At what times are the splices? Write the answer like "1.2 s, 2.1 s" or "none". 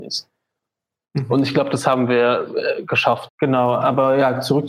3.3 s